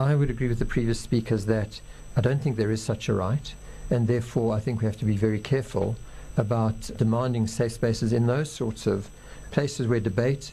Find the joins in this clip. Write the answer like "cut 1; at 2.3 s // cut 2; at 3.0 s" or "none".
cut 1; at 6.9 s // cut 2; at 9.5 s